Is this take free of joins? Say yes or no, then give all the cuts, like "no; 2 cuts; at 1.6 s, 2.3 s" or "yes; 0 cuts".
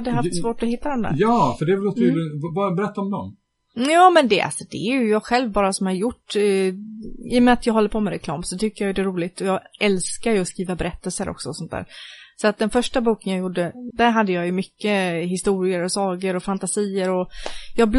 no; 1 cut; at 13.9 s